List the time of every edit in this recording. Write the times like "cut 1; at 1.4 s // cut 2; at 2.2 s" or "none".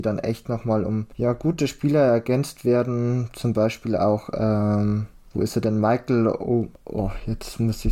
none